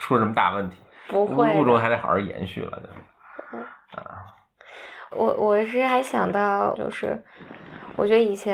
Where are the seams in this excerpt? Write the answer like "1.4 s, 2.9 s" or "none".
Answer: 5.1 s, 6.8 s